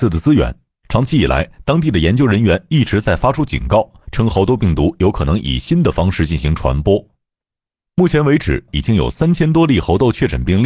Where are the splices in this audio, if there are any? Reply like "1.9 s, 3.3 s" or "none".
8.7 s